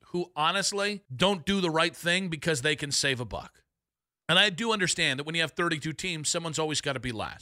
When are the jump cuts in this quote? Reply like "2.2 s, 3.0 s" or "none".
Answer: 1.0 s, 4.2 s